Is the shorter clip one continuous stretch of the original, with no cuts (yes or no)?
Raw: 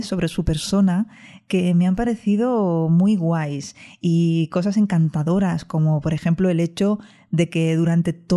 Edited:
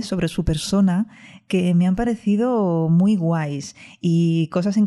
yes